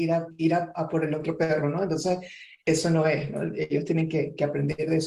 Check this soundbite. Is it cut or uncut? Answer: uncut